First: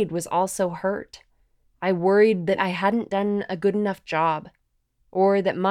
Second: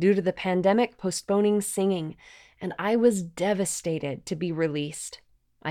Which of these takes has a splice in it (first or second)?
first